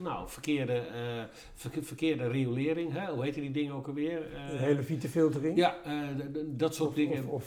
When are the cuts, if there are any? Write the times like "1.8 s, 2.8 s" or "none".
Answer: none